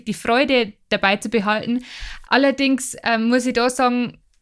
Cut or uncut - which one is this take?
cut